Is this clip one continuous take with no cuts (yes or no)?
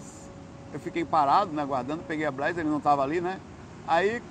yes